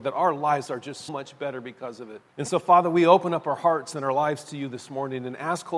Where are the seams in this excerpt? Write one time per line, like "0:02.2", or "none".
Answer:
0:01.1
0:02.3